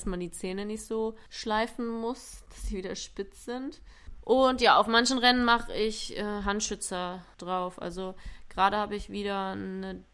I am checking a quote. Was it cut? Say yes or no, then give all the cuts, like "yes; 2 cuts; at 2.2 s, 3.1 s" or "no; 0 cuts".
yes; 1 cut; at 4.1 s